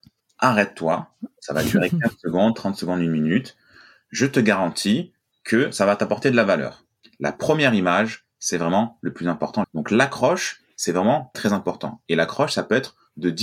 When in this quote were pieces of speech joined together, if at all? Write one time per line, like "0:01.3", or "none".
0:07.0
0:09.6
0:11.3